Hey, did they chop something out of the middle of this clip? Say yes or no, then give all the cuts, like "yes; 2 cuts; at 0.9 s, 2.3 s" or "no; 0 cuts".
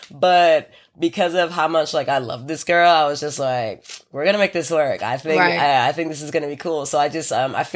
no; 0 cuts